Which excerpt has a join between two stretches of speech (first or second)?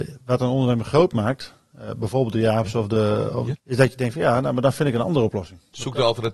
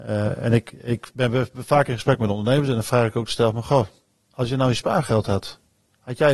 first